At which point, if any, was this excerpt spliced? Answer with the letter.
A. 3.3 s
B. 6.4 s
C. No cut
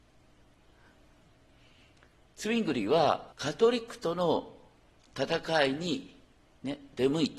A